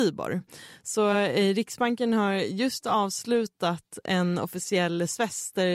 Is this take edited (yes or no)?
no